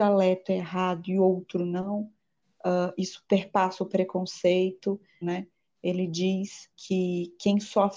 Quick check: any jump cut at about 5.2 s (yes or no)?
yes